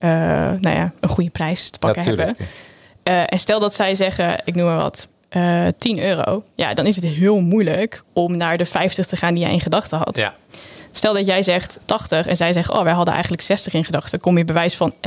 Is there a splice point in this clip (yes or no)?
yes